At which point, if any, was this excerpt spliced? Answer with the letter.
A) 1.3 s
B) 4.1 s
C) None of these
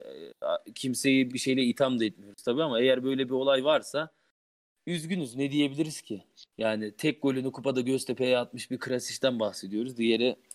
A